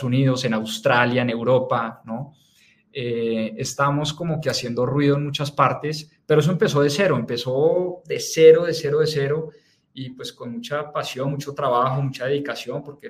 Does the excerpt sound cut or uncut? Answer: uncut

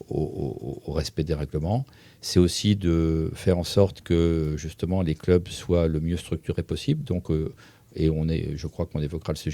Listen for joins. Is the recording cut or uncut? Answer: uncut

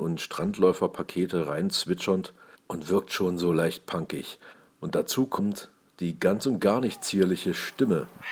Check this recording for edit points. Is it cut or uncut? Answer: uncut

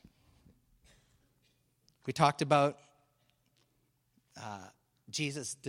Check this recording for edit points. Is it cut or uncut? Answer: uncut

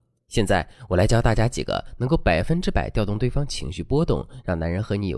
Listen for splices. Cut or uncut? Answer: uncut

